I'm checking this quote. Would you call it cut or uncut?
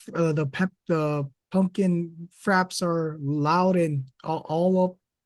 uncut